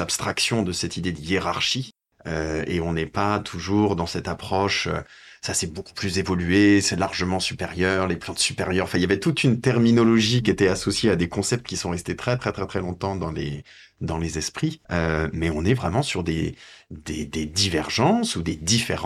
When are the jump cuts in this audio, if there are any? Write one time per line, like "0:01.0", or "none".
0:14.8